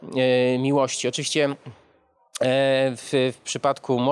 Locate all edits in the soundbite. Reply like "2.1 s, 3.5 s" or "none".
none